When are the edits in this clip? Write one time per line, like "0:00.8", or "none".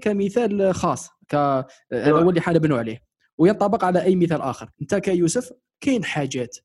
0:04.7